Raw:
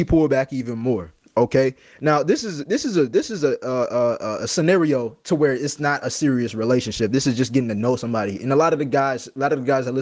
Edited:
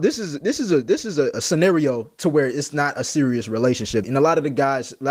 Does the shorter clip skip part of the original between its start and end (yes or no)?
yes